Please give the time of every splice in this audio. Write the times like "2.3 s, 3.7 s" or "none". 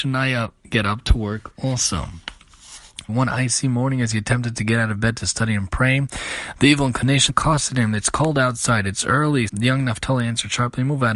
3.1 s, 7.3 s, 9.5 s